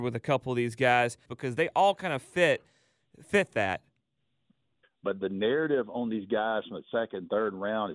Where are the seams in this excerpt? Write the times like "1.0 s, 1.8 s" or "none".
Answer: 1.3 s, 4.8 s